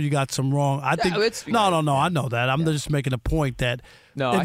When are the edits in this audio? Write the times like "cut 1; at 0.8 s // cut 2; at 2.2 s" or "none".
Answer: cut 1; at 1.5 s